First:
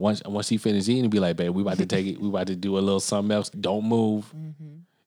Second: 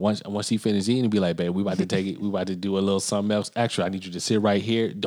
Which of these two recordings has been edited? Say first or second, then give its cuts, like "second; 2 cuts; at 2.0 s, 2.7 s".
first; 1 cut; at 3.5 s